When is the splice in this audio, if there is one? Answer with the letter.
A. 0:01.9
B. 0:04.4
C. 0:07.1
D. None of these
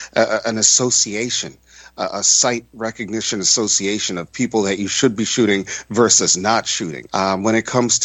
C